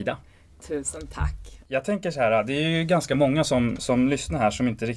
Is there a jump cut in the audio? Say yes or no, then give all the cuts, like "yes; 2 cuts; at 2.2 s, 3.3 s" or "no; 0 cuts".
no; 0 cuts